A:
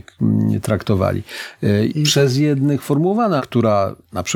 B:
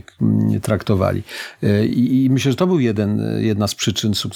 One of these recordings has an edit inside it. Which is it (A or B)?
A